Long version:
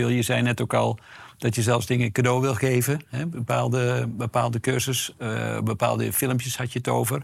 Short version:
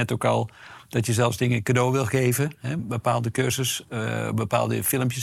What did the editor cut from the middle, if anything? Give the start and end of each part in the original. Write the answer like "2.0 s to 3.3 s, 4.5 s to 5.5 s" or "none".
3.3 s to 4.1 s